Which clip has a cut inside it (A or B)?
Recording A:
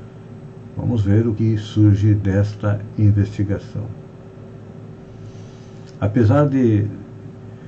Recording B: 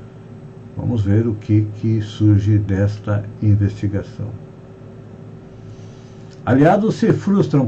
A